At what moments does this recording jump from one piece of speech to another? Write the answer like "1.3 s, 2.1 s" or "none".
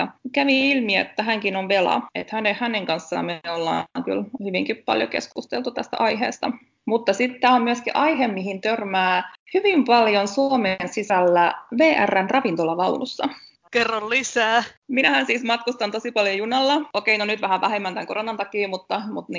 14.8 s